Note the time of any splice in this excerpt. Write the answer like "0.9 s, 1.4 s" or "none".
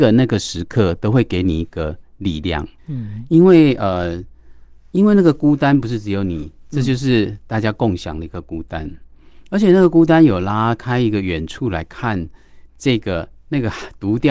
2.8 s